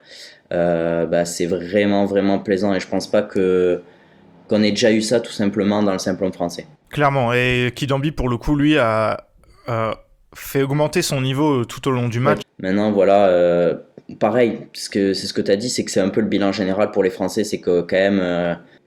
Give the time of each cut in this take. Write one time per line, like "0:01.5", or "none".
0:12.4